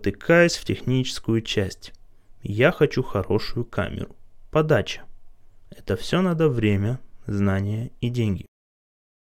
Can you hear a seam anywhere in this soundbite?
yes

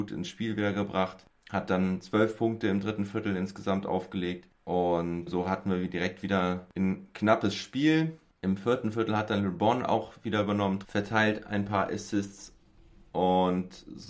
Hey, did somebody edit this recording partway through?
yes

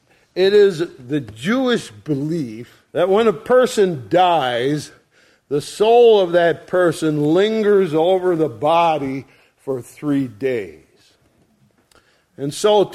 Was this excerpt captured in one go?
no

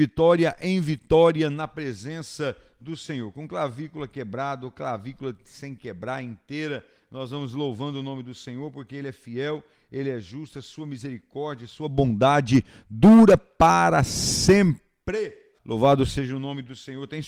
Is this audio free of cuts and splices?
no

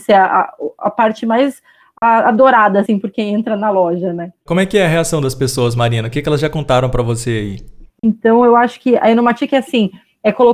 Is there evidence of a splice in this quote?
yes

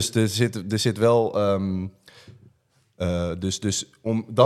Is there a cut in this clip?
no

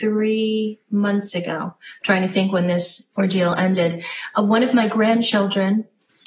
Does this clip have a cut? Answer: no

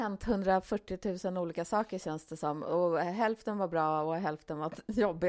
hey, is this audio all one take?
yes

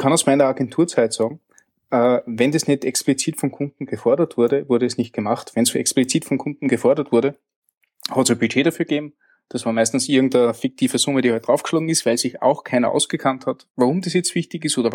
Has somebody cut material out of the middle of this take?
no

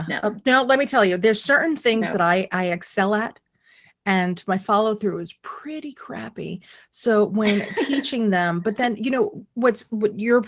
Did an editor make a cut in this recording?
no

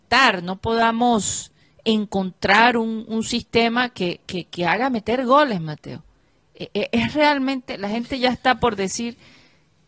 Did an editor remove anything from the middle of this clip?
no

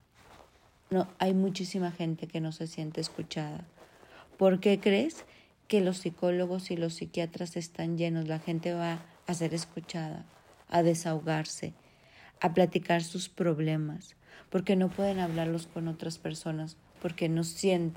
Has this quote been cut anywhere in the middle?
yes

